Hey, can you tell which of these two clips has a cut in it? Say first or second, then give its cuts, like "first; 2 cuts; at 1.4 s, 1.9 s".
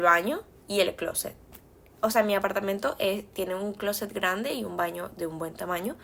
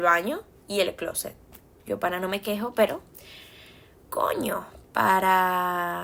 second; 1 cut; at 1.8 s